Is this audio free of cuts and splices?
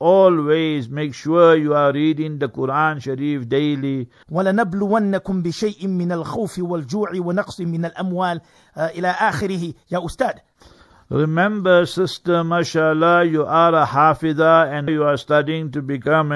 no; 2 cuts; at 4.2 s, 14.9 s

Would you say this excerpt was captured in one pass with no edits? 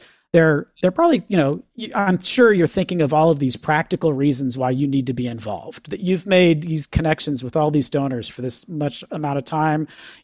yes; 0 cuts

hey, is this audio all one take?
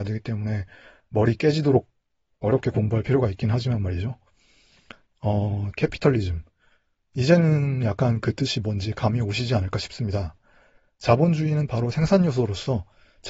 no; 1 cut; at 5.7 s

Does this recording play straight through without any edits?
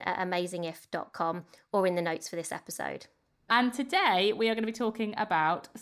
yes; 0 cuts

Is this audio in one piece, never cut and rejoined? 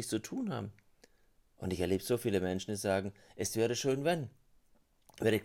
no; 1 cut; at 1.5 s

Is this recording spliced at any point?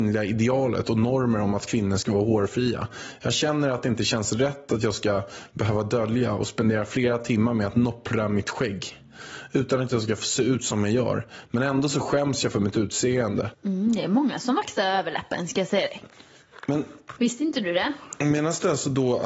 yes; 1 cut; at 13.5 s

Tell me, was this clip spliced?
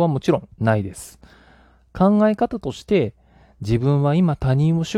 no; 0 cuts

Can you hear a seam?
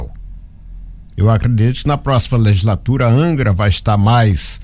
no; 0 cuts

